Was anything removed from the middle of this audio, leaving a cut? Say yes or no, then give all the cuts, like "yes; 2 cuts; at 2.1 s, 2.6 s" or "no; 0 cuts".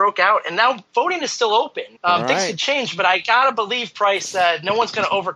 yes; 1 cut; at 2.0 s